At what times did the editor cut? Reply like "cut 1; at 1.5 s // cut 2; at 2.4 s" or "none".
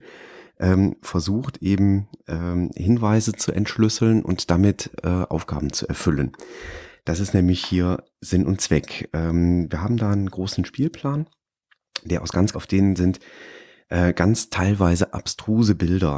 cut 1; at 12.5 s

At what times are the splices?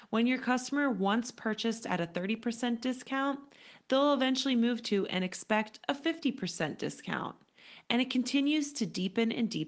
none

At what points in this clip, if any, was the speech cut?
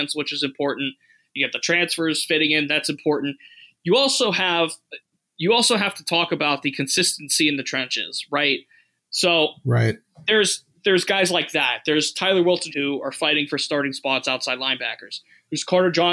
cut 1; at 9.0 s // cut 2; at 12.7 s

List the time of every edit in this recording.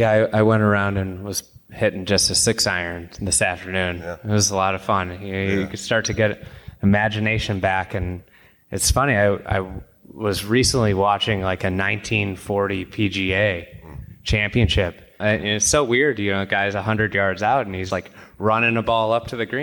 cut 1; at 15.2 s // cut 2; at 17.9 s

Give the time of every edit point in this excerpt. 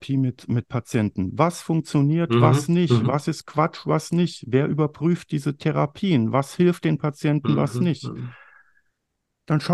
none

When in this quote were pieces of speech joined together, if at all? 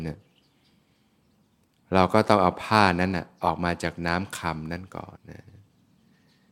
cut 1; at 5.2 s

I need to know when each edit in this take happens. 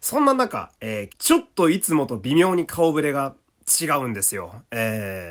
cut 1; at 1.1 s

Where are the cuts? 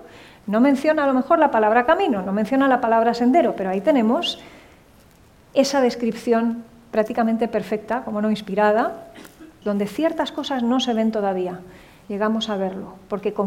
cut 1; at 9.6 s // cut 2; at 12.0 s

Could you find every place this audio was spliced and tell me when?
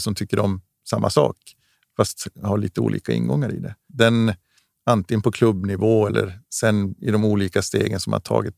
cut 1; at 3.9 s

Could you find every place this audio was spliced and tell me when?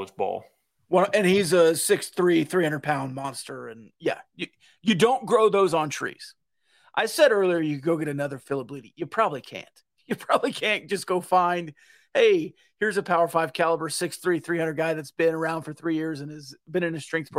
none

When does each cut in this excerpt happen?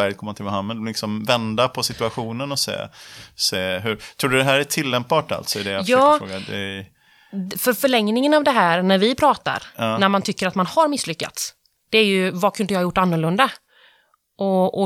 none

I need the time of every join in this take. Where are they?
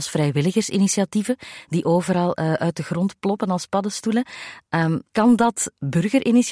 cut 1; at 5.1 s

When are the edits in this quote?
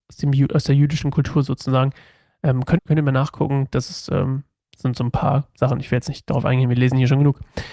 cut 1; at 2.8 s

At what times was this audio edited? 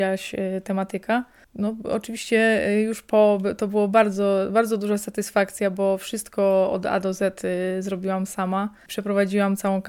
cut 1; at 1.4 s

